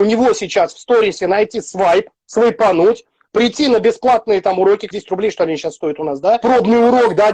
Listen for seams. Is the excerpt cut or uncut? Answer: cut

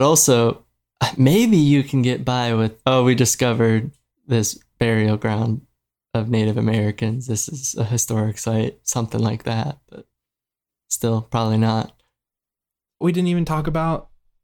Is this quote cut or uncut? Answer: cut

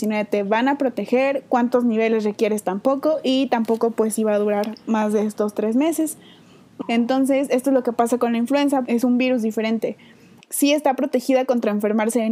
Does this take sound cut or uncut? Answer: cut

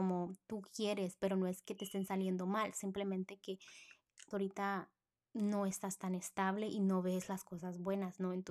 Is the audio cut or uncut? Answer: cut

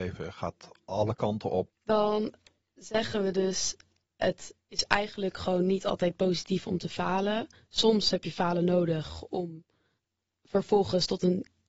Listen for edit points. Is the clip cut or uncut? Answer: cut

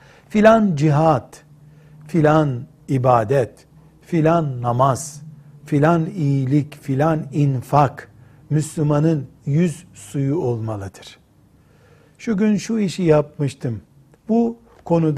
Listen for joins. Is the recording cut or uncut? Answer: cut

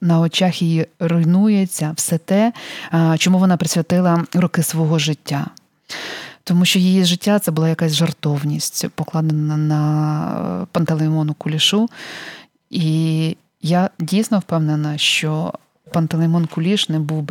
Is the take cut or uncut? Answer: uncut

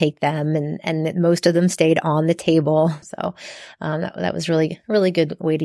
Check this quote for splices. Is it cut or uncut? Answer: cut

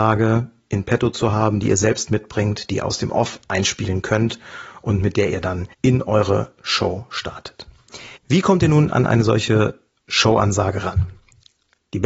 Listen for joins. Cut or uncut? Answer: cut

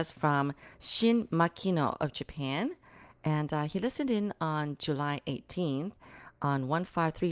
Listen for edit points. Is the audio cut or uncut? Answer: uncut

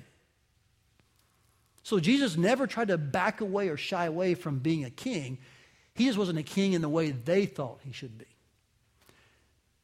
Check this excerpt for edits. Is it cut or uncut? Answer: cut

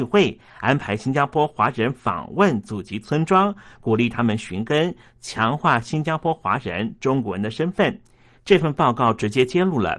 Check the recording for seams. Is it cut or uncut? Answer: cut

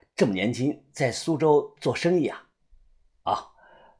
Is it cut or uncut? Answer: uncut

